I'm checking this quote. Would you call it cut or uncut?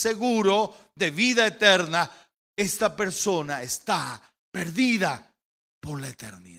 uncut